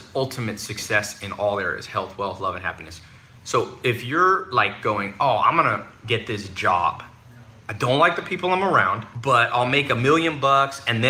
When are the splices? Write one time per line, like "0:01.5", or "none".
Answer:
none